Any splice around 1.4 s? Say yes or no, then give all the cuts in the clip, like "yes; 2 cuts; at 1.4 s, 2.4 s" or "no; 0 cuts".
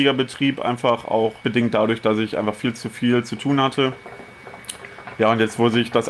yes; 1 cut; at 1.4 s